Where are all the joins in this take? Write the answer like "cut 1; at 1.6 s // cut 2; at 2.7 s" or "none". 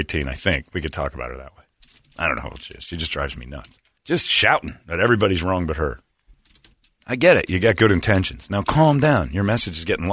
cut 1; at 4.0 s